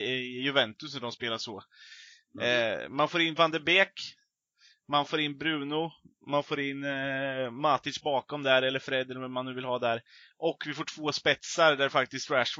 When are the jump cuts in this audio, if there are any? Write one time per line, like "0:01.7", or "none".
none